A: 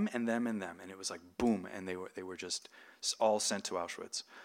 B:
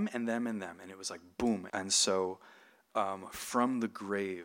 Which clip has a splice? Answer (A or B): B